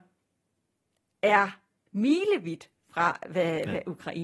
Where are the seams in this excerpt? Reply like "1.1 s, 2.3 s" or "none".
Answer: 1.9 s